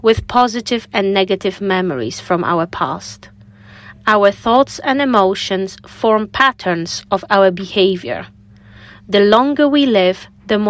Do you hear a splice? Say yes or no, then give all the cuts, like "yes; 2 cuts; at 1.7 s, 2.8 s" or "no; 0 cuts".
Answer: no; 0 cuts